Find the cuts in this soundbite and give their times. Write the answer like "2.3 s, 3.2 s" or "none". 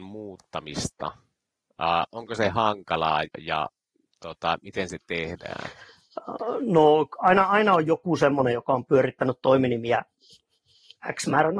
3.2 s